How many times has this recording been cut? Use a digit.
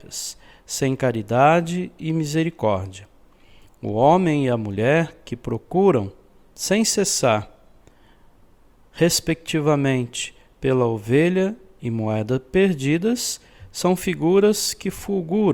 0